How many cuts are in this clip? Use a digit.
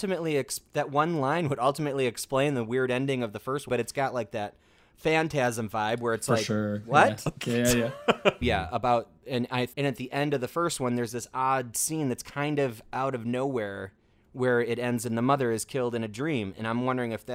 3